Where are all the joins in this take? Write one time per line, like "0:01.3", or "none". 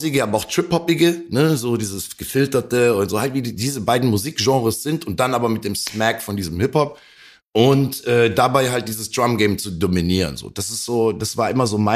none